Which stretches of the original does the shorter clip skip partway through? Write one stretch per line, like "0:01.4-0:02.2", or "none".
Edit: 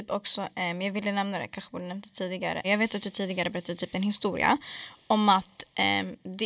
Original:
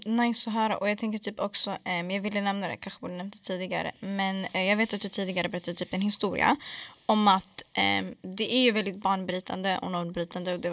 0:03.9-0:04.6

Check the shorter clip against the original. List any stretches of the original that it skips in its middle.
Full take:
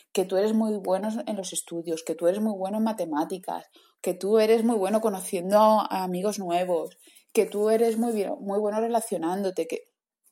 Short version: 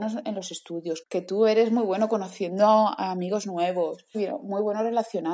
0:02.0-0:03.9
0:07.1-0:08.1

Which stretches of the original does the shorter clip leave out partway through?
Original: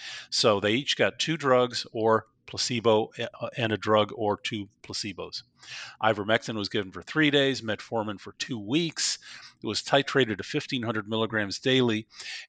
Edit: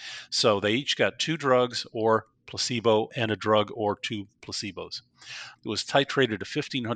0:03.1-0:03.5
0:06.0-0:09.5

